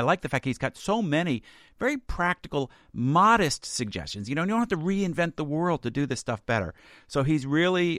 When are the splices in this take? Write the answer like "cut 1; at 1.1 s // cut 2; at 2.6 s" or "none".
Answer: none